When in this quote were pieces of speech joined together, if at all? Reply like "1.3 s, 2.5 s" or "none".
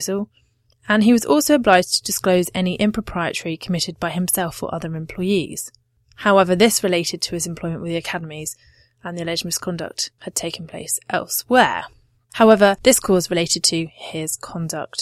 none

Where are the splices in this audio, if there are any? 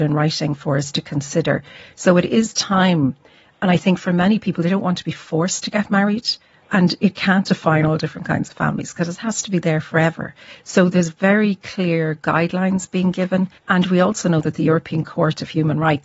6.6 s, 13.6 s

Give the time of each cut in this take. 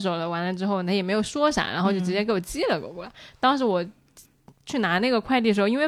none

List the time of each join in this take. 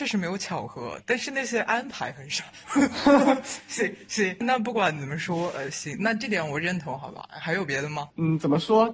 4.4 s

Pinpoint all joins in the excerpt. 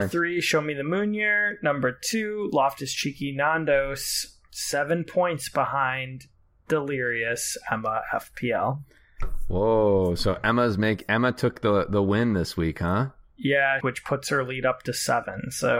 13.8 s

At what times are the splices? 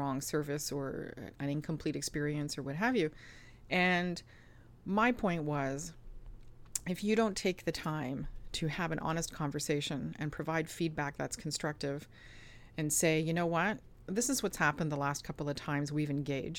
none

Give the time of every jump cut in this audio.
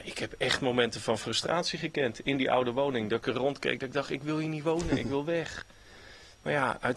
none

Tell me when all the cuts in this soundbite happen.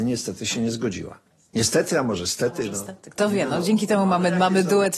none

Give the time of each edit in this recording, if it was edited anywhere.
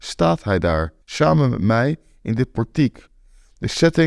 1.0 s

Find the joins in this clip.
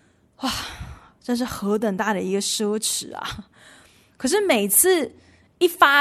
4.1 s

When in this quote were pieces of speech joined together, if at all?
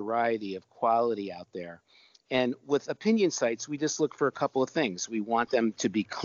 none

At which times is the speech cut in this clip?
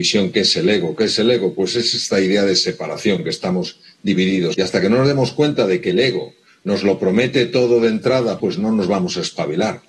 4.5 s, 8.4 s

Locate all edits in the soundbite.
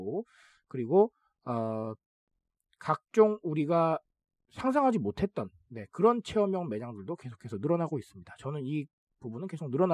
none

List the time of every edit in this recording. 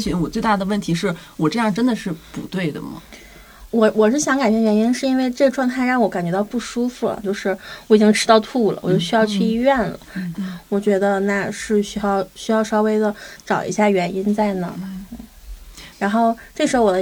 7.2 s, 10.3 s, 15.9 s

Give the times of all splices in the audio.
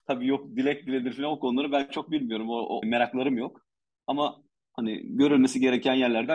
2.8 s

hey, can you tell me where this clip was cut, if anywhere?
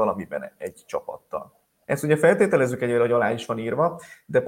1.8 s

